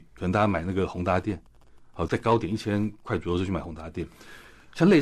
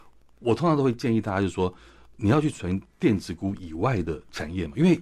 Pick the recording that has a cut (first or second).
first